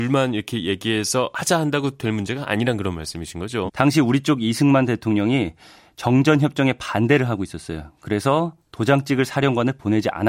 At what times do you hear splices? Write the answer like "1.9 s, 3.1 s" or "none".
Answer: 3.7 s